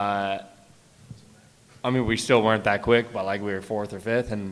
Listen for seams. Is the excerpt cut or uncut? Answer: uncut